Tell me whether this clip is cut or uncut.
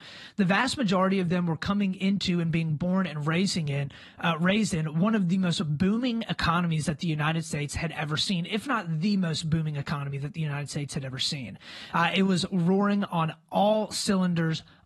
uncut